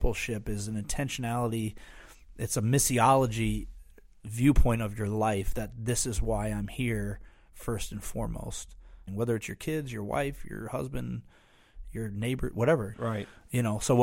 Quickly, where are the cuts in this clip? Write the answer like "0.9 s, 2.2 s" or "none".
9.1 s, 12.9 s